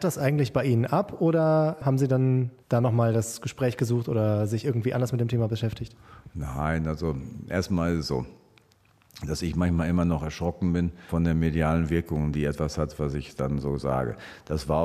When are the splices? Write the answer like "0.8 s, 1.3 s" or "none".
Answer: 2.6 s